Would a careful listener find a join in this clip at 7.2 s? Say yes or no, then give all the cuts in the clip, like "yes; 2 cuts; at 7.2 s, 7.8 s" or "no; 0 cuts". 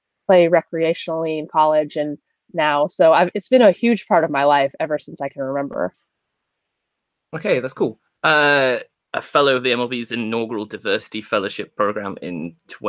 no; 1 cut; at 8.9 s